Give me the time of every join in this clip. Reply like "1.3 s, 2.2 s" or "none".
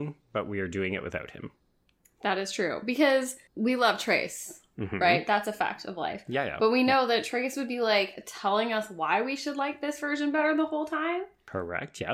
3.5 s